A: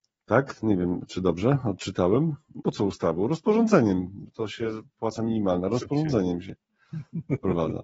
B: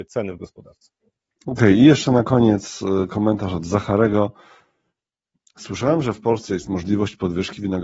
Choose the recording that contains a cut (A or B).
A